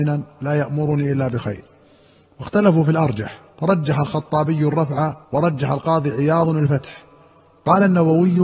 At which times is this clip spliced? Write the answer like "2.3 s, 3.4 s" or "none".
3.5 s, 5.2 s